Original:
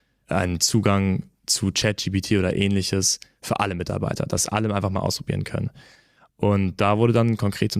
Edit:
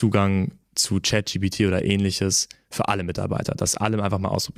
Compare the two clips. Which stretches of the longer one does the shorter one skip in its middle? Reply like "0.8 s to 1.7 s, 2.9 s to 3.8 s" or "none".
none

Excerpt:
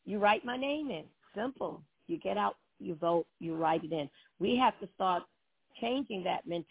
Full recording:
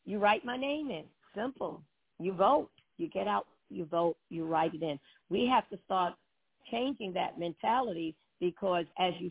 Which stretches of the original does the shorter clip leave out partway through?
1.9 s to 2.8 s

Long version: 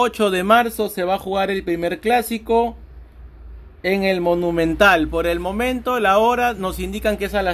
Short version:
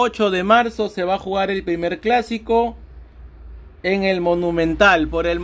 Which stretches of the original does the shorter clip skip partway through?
none

